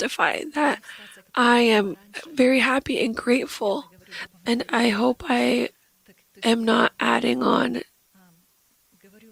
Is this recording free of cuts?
no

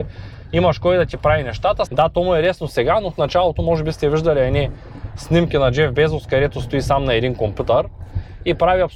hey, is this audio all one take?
no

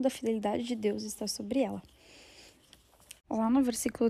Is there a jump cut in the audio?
yes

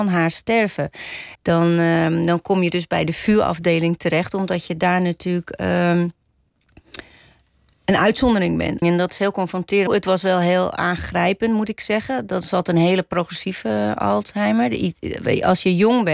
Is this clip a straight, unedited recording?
no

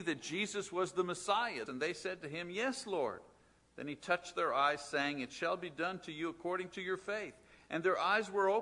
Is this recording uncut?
no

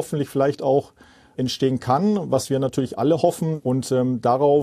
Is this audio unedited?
no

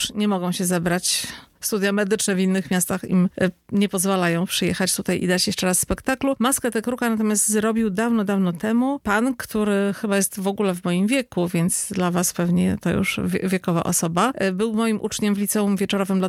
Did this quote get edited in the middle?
no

